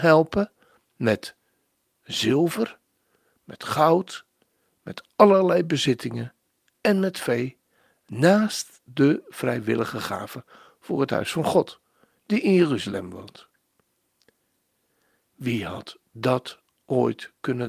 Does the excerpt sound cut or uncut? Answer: uncut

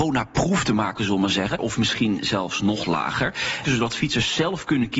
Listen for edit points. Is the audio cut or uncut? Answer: cut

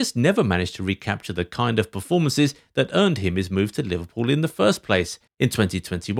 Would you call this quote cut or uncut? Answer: cut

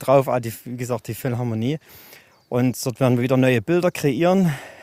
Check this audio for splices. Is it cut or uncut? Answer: uncut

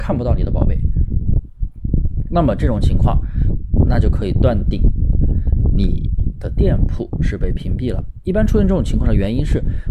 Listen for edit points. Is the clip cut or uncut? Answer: uncut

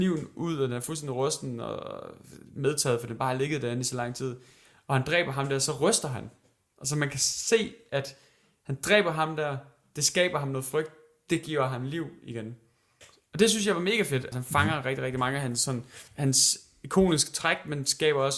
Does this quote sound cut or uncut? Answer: cut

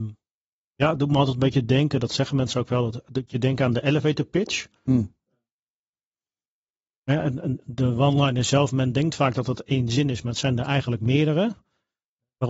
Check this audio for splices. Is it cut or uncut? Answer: uncut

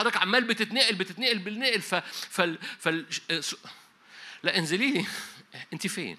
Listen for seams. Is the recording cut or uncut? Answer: uncut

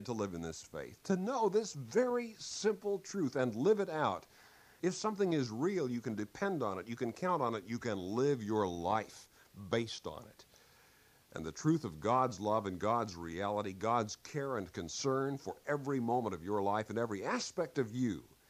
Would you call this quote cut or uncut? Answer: uncut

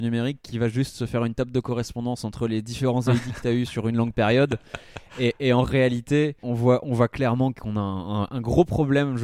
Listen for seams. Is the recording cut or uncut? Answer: cut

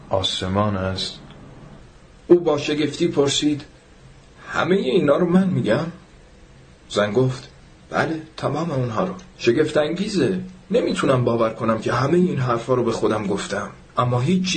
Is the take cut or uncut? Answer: uncut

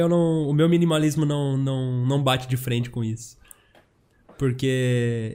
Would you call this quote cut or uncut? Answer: uncut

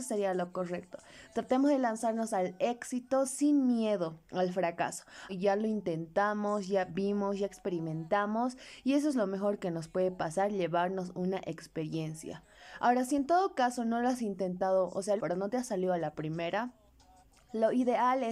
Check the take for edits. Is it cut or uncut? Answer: cut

